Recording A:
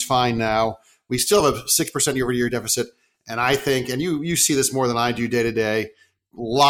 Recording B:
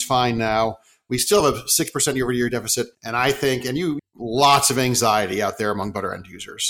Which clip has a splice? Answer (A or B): B